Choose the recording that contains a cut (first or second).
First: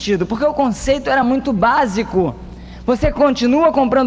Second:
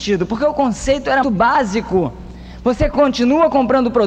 second